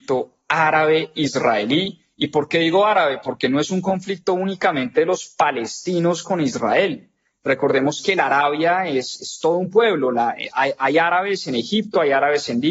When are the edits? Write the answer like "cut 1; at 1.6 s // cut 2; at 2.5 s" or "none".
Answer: none